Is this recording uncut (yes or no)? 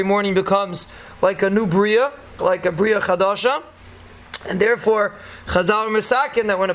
no